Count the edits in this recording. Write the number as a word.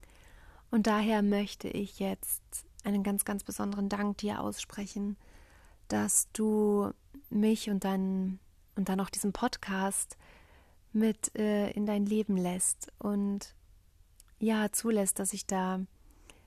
zero